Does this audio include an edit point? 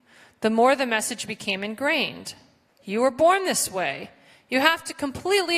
yes; 1 cut; at 2.7 s

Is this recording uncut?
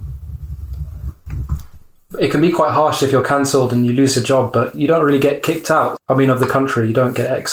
no; 1 cut; at 6.0 s

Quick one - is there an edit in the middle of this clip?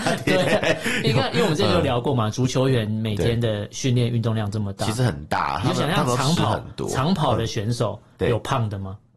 no; 0 cuts

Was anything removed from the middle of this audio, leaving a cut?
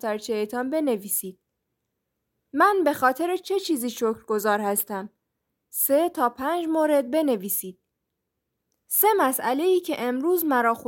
no; 0 cuts

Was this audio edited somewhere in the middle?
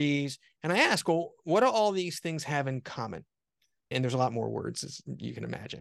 no; 0 cuts

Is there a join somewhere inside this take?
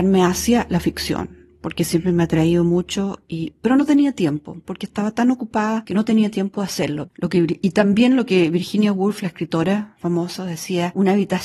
yes; 1 cut; at 7.1 s

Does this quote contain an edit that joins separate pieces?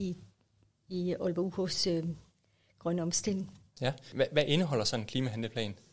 no; 0 cuts

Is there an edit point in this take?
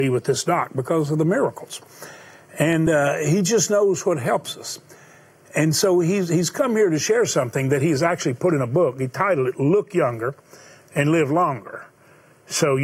no; 0 cuts

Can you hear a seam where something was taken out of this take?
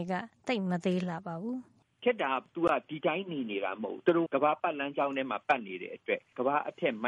yes; 1 cut; at 4.3 s

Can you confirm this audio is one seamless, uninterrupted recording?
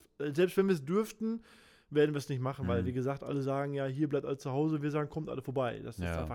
yes; 0 cuts

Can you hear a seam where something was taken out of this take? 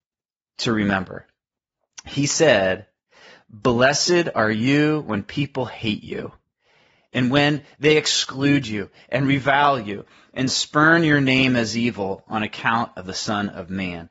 no; 0 cuts

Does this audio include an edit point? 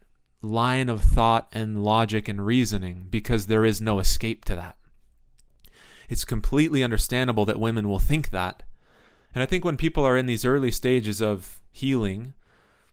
yes; 1 cut; at 9.3 s

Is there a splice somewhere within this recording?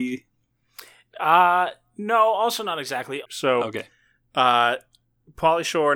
yes; 1 cut; at 3.2 s

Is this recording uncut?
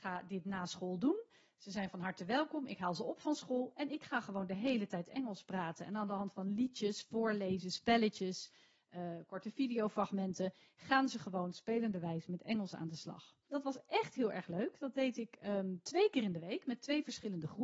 no; 1 cut; at 13.5 s

